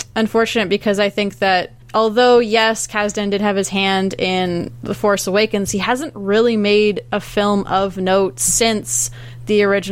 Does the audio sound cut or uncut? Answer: cut